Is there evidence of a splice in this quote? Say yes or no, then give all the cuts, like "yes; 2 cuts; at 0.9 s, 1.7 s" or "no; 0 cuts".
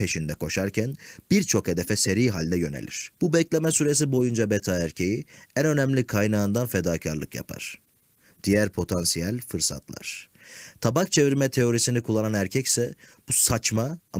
yes; 1 cut; at 3.2 s